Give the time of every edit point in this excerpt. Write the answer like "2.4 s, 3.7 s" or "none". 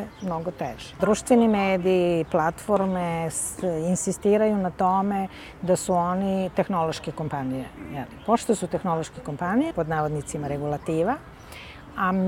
1.0 s, 9.7 s